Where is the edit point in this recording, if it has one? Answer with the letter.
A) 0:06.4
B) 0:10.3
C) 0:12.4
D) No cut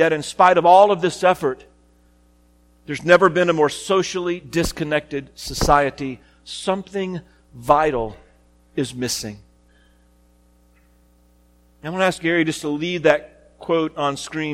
D